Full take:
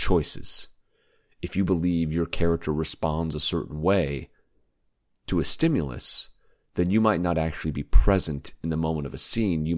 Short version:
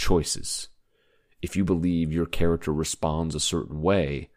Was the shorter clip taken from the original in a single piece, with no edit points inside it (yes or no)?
yes